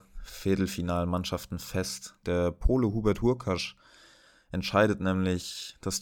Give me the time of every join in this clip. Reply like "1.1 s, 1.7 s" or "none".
2.2 s